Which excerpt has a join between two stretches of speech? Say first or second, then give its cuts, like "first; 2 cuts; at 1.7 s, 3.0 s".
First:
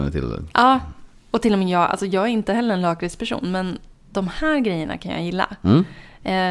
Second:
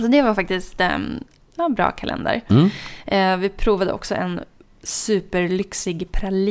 second; 1 cut; at 1.4 s